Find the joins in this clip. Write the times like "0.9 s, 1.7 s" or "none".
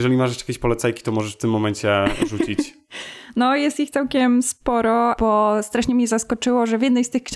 none